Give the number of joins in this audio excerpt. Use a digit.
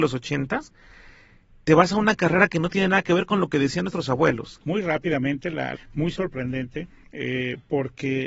2